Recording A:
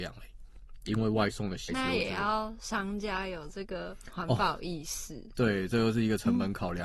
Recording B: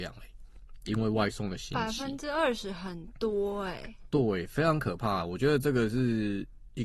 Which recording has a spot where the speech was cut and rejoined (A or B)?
A